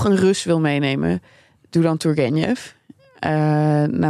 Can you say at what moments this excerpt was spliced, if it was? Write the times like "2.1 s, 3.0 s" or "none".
none